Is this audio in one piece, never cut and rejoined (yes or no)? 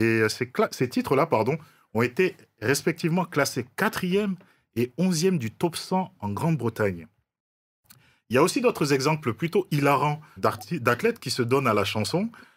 no